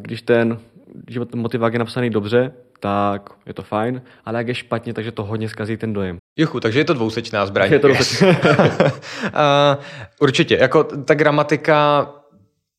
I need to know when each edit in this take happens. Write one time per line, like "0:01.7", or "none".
0:06.2